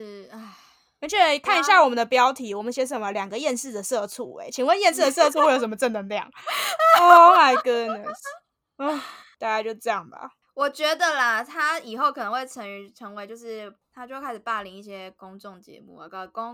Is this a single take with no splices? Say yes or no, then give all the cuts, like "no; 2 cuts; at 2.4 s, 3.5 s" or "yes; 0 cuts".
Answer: yes; 0 cuts